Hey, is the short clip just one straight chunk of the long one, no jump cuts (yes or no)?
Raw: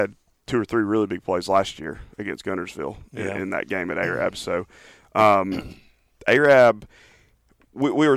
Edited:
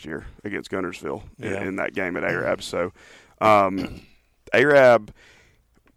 yes